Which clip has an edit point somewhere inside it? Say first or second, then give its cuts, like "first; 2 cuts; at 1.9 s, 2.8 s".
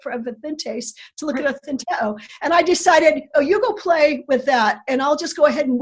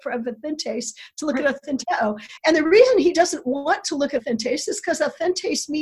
second; 1 cut; at 2.4 s